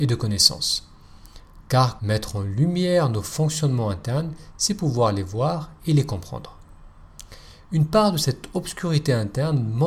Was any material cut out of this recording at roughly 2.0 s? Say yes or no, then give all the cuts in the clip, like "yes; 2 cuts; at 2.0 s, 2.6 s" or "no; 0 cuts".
yes; 1 cut; at 2.0 s